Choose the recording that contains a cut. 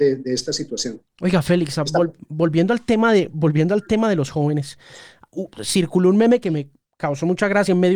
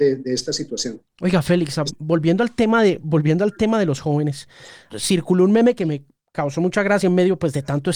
second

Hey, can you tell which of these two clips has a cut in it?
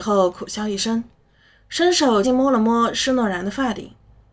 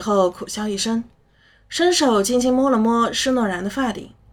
first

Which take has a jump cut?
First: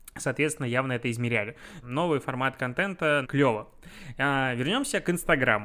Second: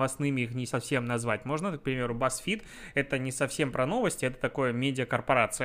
first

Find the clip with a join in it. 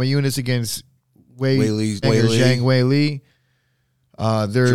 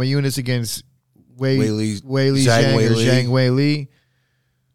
first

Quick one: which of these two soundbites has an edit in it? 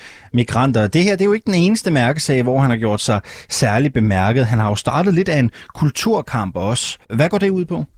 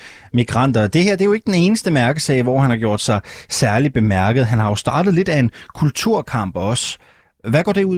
first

